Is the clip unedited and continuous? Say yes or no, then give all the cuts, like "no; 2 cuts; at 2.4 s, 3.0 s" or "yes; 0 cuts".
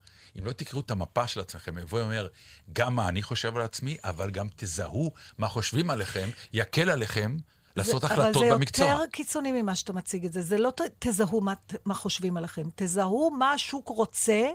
yes; 0 cuts